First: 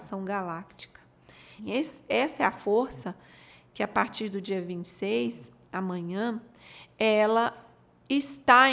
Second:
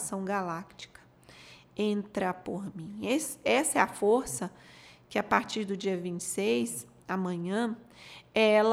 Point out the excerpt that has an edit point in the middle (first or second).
first